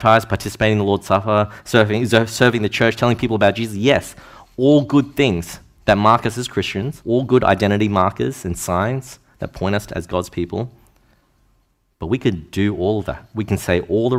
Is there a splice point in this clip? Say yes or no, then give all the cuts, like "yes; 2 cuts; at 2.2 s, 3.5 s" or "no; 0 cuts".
yes; 1 cut; at 7.0 s